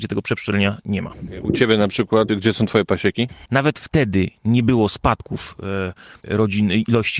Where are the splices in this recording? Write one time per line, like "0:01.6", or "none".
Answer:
0:02.3
0:03.5